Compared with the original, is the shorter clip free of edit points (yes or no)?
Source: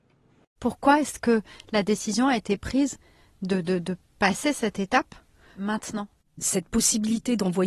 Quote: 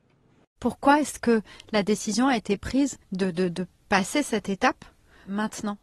no